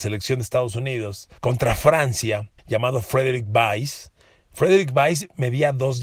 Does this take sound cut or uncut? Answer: cut